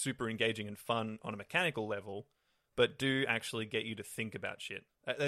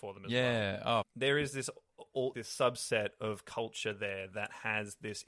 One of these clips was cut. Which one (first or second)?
second